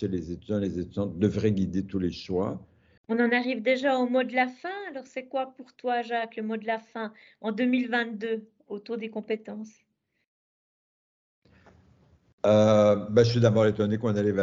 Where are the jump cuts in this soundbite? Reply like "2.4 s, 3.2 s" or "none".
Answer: 3.0 s